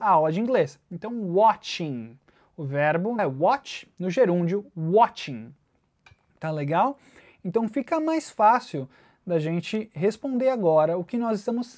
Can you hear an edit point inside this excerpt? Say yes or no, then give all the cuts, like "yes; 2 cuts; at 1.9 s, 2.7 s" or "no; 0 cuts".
yes; 1 cut; at 3.2 s